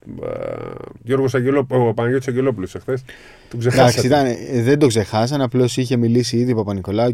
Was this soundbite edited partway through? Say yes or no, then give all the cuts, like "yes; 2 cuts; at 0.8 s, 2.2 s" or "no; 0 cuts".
no; 0 cuts